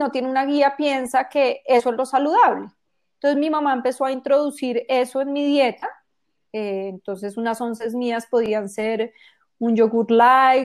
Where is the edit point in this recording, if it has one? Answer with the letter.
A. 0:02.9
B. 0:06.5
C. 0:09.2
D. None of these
D